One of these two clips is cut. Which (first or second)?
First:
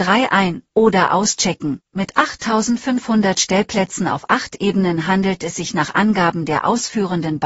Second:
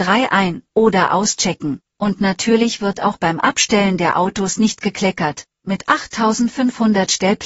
first